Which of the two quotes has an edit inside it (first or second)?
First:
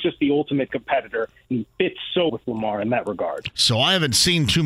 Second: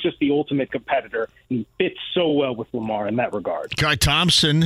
first